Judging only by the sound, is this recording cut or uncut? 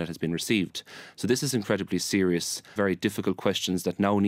cut